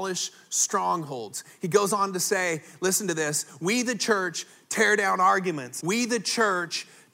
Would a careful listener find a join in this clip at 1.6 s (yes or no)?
no